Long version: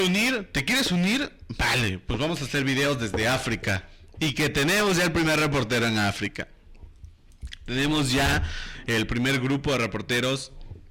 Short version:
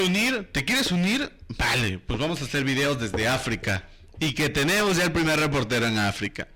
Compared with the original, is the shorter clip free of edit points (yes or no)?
yes